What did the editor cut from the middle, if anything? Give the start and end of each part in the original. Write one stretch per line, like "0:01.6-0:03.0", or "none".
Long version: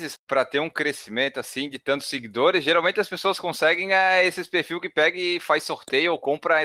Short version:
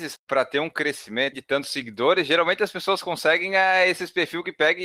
0:01.3-0:01.7